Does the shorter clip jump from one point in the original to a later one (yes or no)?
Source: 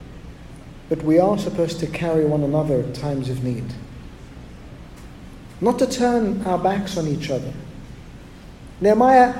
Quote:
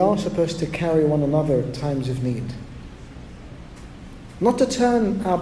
no